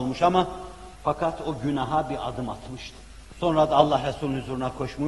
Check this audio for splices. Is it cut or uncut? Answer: cut